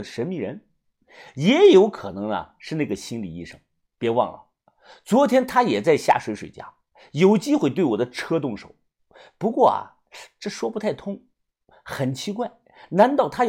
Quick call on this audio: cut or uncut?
uncut